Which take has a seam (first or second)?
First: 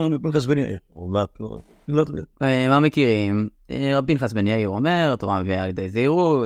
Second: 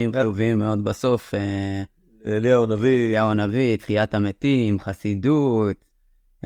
first